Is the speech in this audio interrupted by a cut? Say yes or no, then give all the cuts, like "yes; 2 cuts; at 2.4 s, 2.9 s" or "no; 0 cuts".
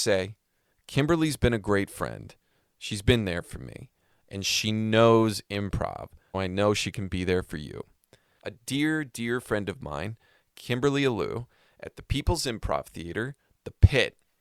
yes; 2 cuts; at 6.3 s, 8.4 s